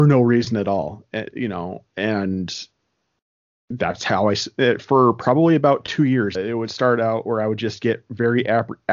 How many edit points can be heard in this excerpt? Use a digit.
1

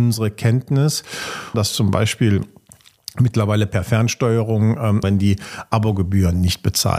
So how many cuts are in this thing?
2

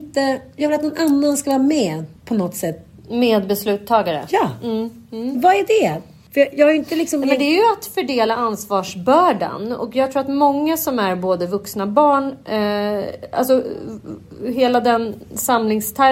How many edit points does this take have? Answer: 1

